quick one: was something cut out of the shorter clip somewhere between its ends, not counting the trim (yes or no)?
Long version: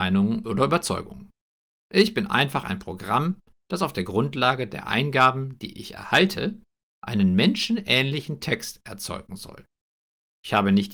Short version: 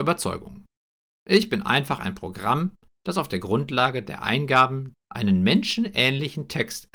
yes